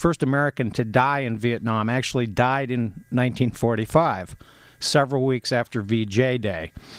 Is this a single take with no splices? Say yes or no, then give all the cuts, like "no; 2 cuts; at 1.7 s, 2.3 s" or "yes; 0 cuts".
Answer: yes; 0 cuts